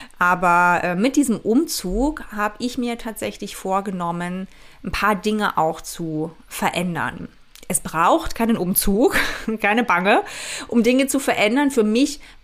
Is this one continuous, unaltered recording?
yes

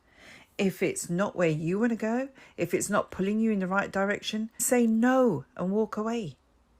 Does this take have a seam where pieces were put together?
yes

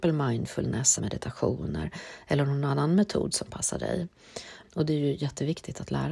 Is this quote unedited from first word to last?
no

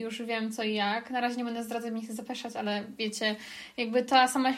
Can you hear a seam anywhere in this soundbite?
no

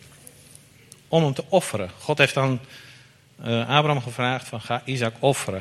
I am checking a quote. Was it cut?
no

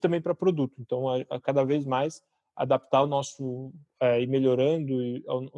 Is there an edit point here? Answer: no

